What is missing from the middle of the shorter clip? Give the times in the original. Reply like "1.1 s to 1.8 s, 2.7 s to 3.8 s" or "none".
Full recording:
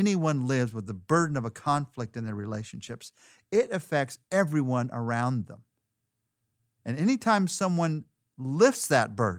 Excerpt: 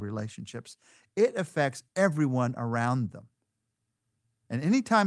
none